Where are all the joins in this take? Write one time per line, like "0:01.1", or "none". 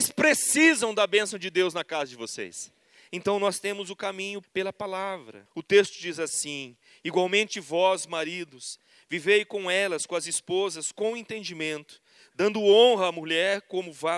0:05.5